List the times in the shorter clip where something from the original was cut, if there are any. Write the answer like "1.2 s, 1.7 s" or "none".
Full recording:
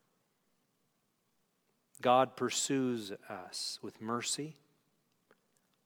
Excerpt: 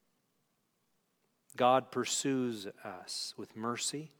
none